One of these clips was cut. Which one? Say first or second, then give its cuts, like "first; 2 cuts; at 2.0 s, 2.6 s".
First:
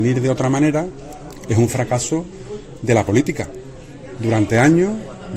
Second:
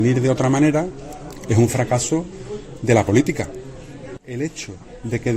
second; 1 cut; at 4.2 s